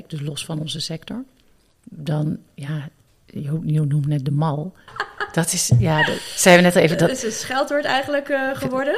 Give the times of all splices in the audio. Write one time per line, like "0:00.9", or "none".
0:04.9